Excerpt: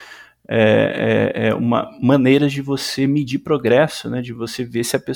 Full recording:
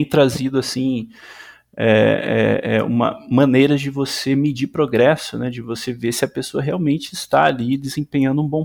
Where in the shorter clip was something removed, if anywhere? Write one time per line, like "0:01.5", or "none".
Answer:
none